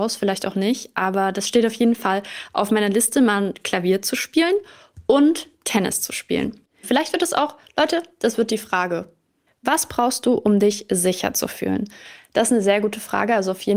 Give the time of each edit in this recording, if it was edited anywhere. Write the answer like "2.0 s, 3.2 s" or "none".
6.8 s, 9.5 s